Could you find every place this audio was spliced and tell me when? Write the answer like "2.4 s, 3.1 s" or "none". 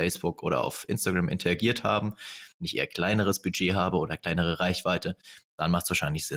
2.5 s